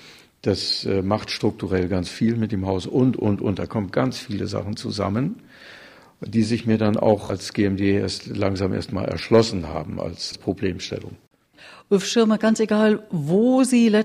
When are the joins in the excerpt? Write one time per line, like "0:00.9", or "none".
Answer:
none